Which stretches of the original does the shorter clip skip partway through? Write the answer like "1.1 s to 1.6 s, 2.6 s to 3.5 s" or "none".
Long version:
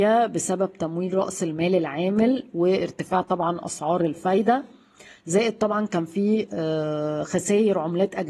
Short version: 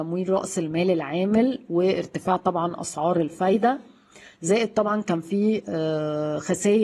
none